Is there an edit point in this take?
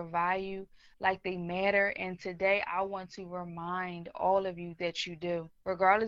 no; 0 cuts

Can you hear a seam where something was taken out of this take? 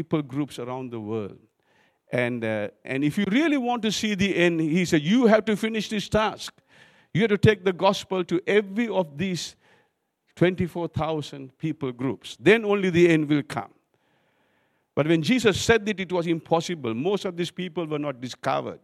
yes; 1 cut; at 2.8 s

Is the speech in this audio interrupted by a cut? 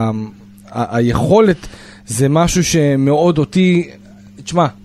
no; 0 cuts

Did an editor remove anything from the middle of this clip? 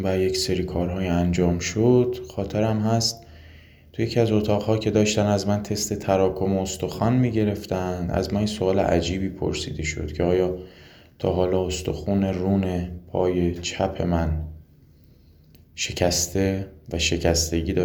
no; 0 cuts

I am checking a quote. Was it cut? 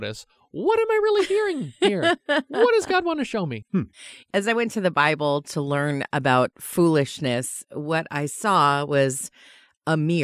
no; 0 cuts

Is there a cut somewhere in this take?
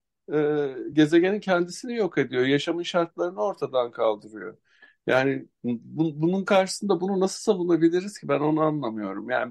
no; 0 cuts

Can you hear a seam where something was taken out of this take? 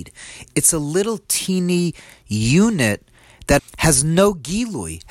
yes; 1 cut; at 3.6 s

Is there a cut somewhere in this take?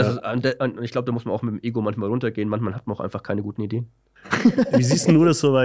no; 0 cuts

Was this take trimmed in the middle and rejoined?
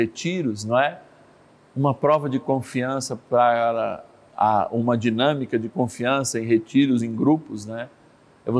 no; 0 cuts

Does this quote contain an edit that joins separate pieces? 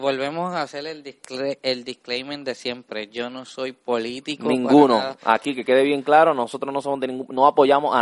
no; 0 cuts

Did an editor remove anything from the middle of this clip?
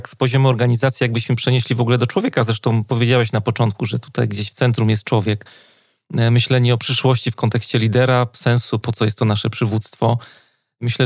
yes; 1 cut; at 8.8 s

